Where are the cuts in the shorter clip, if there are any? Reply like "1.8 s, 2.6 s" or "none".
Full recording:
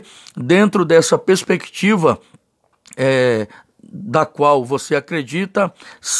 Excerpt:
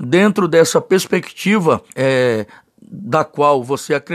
1.9 s